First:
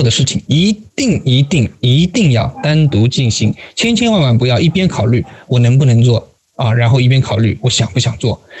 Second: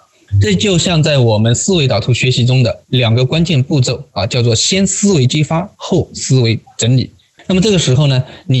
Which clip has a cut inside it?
second; 1 cut; at 7.4 s

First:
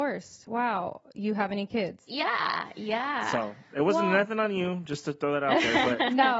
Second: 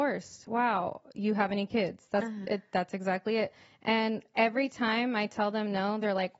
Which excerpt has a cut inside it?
first; 1 cut; at 2.1 s

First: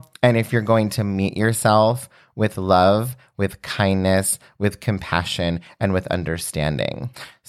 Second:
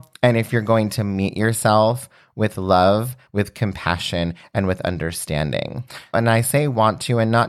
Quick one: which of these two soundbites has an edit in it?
second; 2 cuts; at 3.3 s, 6.1 s

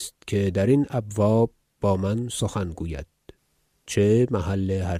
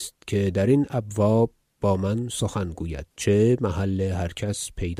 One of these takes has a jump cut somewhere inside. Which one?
second; 1 cut; at 3.1 s

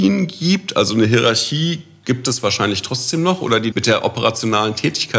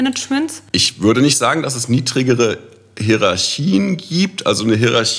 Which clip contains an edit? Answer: first; 1 cut; at 3.7 s

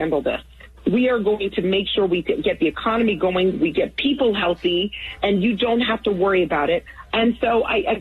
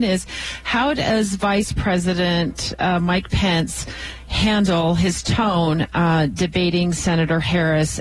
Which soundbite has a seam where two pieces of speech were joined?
first; 1 cut; at 7.1 s

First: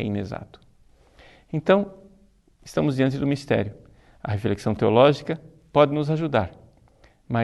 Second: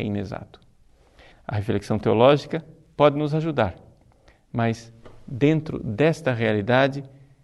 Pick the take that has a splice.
second; 1 cut; at 1.3 s

